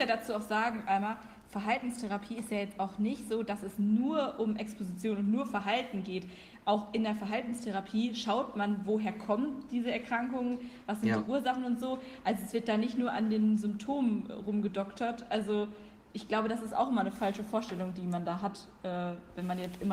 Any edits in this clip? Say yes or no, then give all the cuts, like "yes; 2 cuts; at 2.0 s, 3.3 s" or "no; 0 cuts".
no; 0 cuts